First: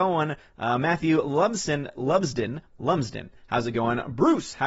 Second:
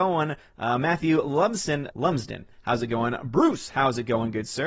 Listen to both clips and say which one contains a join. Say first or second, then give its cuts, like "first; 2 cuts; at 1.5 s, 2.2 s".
second; 1 cut; at 1.9 s